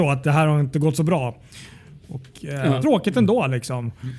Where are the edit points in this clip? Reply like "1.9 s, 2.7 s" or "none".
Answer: 2.8 s